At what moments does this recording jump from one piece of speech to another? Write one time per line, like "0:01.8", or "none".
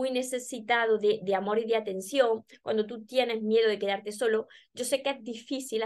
none